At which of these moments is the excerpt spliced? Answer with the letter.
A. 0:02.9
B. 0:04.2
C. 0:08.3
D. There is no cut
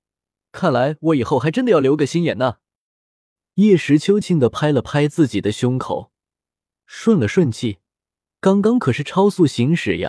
B